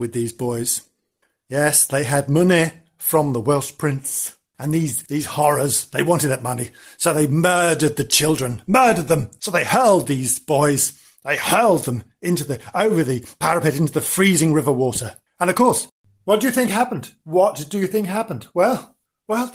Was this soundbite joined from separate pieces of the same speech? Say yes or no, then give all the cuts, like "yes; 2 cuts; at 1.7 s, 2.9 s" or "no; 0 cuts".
no; 0 cuts